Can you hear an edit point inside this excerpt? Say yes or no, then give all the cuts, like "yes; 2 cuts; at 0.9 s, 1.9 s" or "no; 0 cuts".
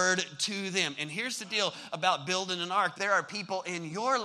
yes; 1 cut; at 2.9 s